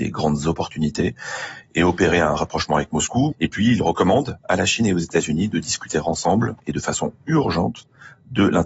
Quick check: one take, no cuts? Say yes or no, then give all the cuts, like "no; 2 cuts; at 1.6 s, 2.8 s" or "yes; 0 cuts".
no; 2 cuts; at 1.6 s, 3.3 s